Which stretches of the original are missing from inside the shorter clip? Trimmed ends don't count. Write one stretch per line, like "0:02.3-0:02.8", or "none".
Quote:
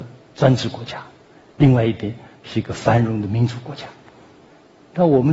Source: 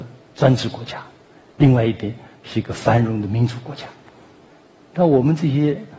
none